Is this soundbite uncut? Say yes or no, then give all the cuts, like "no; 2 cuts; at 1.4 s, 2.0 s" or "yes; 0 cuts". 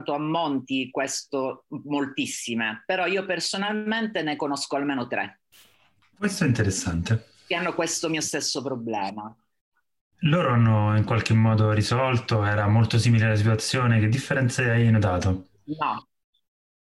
no; 1 cut; at 6.0 s